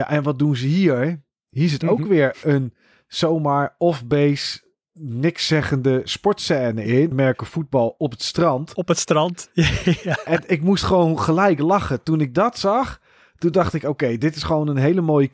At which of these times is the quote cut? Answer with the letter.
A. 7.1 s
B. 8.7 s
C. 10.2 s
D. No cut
A